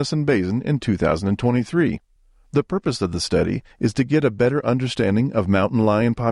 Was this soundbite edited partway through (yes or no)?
no